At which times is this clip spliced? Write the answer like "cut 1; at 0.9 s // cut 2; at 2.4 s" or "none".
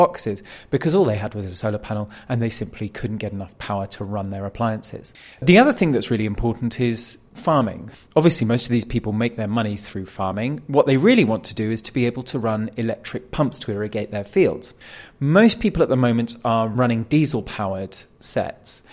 none